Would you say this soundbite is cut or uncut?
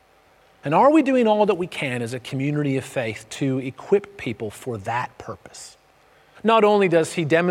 cut